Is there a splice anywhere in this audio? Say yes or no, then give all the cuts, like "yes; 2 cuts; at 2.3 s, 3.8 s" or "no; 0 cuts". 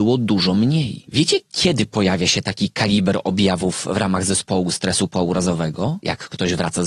yes; 1 cut; at 1.0 s